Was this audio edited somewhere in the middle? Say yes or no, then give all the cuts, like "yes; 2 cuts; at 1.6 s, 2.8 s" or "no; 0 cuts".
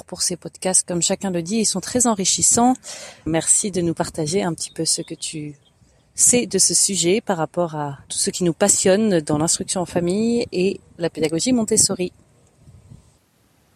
yes; 3 cuts; at 3.3 s, 8.0 s, 10.9 s